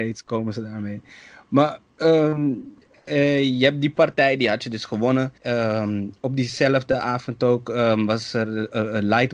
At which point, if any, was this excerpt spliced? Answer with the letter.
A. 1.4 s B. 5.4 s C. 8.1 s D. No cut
B